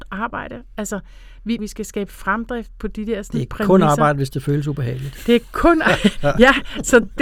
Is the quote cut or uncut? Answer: cut